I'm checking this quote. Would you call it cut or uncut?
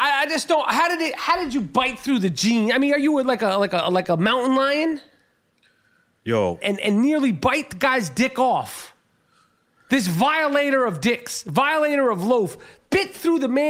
cut